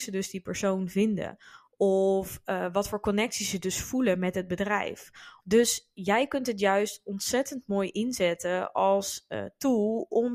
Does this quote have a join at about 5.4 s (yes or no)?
yes